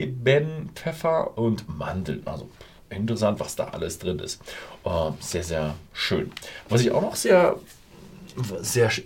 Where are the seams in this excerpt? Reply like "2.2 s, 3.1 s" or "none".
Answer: none